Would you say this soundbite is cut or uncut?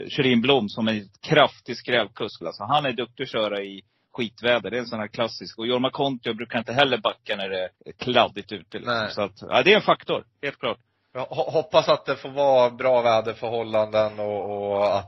cut